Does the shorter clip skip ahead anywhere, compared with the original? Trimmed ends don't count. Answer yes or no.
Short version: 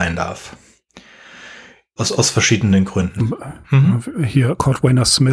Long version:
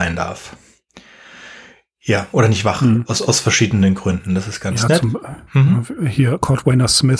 yes